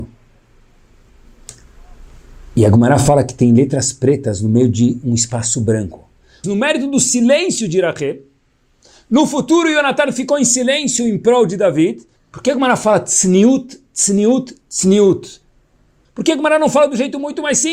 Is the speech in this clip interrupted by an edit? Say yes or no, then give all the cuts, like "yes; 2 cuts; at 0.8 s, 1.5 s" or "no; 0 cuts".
yes; 3 cuts; at 6.4 s, 12.2 s, 16.1 s